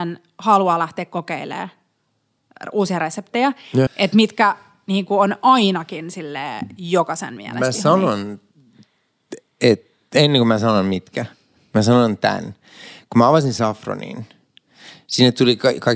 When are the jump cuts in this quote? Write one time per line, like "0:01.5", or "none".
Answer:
0:03.9